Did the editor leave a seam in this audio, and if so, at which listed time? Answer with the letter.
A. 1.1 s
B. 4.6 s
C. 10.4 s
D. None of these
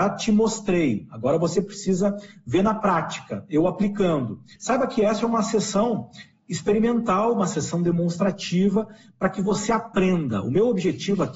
B